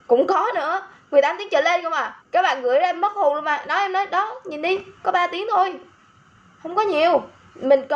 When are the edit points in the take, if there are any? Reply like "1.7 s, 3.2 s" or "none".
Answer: 2.2 s